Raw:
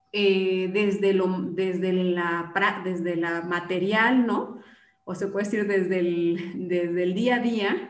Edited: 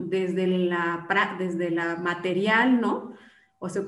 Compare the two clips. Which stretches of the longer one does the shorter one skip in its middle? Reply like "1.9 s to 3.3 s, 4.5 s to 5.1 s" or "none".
none